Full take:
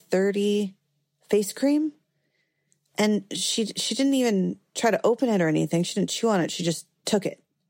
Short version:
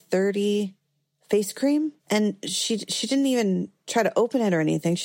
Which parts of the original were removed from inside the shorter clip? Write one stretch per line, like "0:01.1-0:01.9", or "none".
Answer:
0:02.0-0:02.9